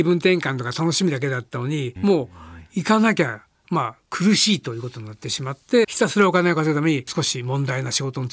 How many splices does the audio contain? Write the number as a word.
two